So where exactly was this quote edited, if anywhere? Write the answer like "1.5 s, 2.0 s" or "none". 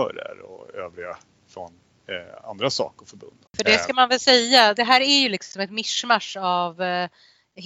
3.5 s, 4.8 s